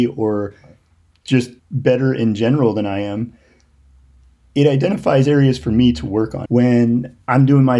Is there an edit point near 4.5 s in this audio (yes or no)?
no